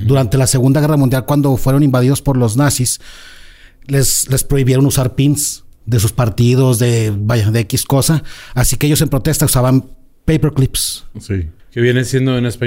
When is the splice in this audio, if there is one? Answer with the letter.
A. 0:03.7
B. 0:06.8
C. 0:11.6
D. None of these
C